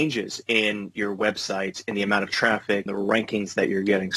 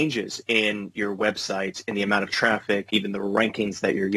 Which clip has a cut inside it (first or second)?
first